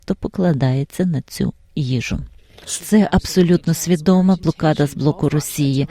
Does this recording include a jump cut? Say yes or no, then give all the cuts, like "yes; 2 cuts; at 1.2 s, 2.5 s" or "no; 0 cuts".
yes; 1 cut; at 2.8 s